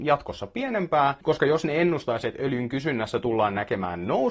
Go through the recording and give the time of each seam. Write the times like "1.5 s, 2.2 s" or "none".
none